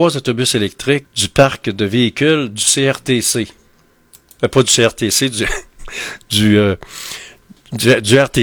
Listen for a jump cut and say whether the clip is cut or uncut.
cut